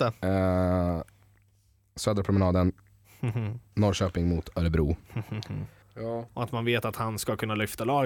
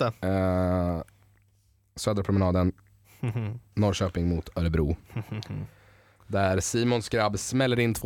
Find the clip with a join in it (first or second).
first